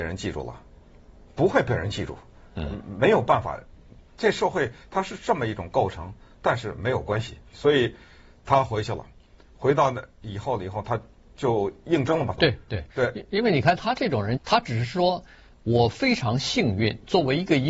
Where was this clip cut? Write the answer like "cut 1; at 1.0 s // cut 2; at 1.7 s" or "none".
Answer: cut 1; at 7.5 s // cut 2; at 12.4 s // cut 3; at 14.4 s